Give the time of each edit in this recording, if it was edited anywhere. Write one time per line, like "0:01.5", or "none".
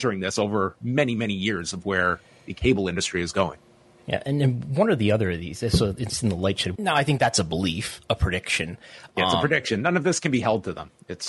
0:06.7

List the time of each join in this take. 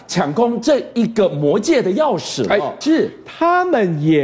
0:02.8

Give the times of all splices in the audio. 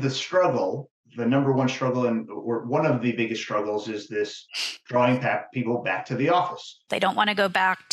0:01.0
0:06.9

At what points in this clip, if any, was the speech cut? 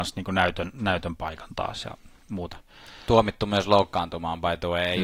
none

